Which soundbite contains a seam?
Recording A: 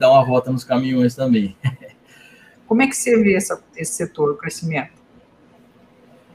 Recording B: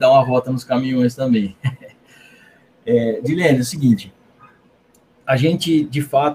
A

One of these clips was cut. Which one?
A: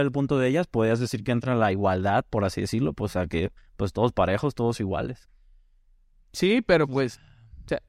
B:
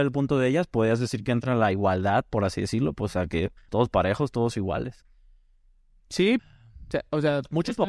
B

